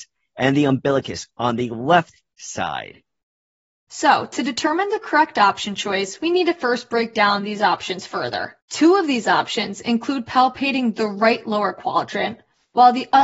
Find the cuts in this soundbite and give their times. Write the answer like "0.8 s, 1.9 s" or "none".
3.7 s, 8.6 s